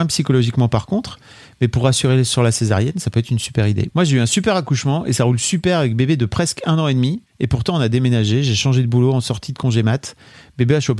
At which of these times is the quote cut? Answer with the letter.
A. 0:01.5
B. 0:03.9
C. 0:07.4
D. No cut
B